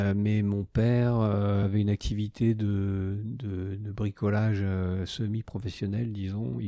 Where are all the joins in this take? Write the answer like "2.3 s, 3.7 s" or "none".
none

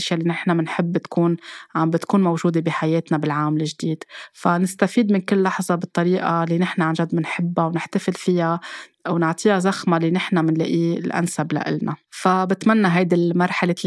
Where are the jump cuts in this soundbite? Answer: 12.0 s

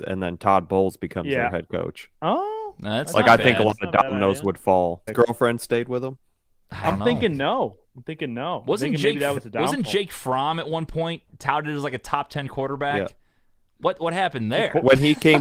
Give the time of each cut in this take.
5.1 s

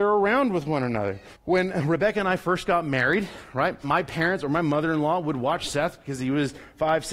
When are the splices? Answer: 1.3 s, 3.8 s

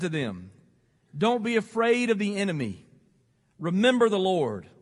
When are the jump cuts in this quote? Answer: none

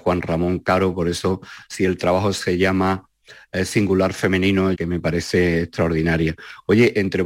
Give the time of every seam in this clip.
4.7 s

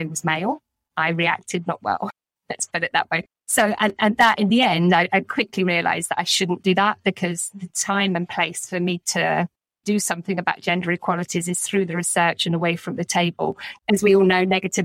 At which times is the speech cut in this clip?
1.8 s, 13.8 s

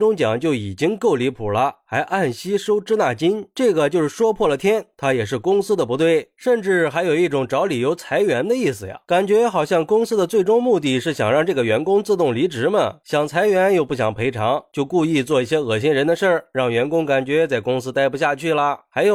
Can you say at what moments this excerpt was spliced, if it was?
none

